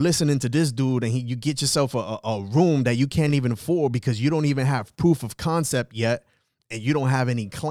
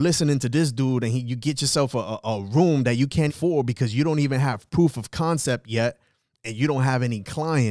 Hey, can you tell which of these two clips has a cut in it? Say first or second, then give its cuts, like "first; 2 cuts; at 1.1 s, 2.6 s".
second; 1 cut; at 3.3 s